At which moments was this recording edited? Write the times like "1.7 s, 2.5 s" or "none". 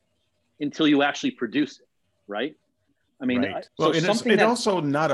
3.7 s